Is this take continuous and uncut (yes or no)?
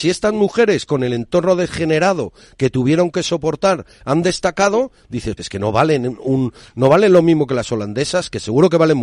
no